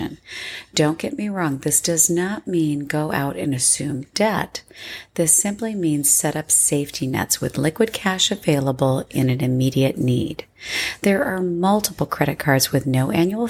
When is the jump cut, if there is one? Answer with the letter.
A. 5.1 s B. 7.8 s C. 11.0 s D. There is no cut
D